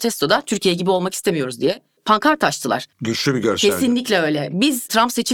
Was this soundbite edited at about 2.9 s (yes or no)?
yes